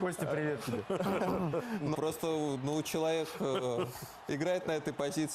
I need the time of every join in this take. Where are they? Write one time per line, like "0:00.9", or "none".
0:01.9